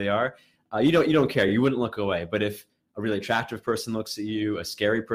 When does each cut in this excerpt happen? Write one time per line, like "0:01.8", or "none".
none

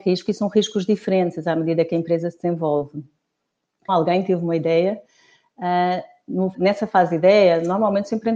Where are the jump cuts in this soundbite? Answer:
0:03.9
0:06.5

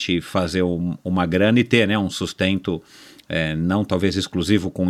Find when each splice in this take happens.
none

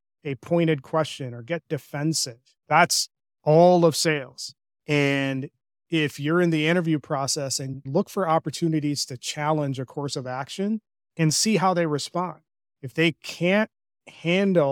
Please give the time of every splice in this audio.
0:02.6
0:07.9

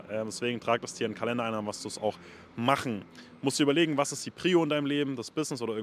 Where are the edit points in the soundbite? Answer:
none

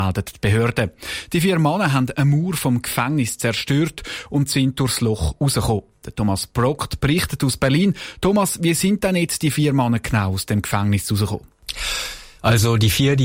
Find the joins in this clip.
none

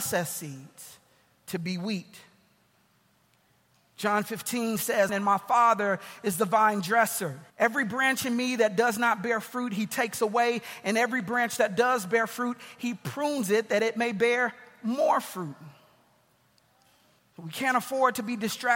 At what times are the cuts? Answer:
0:05.1
0:07.5
0:17.2

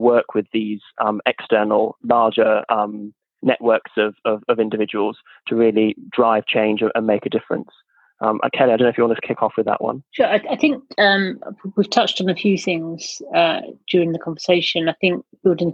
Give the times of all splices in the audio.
0:10.1

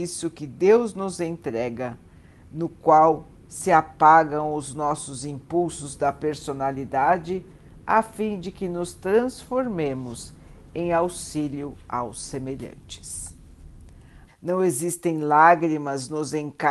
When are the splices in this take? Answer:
0:14.3

